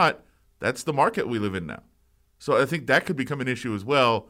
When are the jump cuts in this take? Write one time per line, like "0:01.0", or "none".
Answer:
none